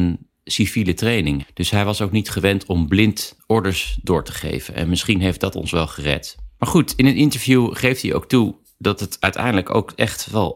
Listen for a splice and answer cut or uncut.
cut